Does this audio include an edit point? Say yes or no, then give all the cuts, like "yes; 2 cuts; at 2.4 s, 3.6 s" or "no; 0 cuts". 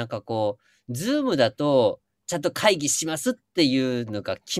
yes; 1 cut; at 2.2 s